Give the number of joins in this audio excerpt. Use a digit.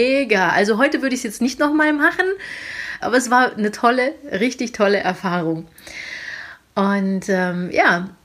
1